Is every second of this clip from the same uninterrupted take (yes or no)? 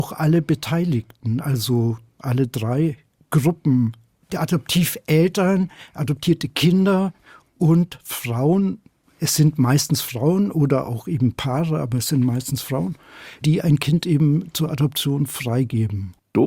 yes